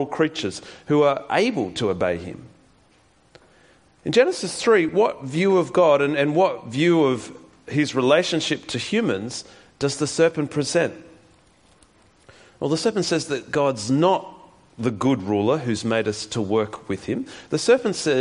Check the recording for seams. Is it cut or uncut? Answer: uncut